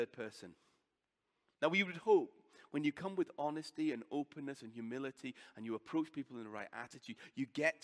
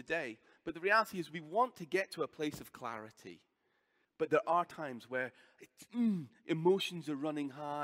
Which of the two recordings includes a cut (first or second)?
second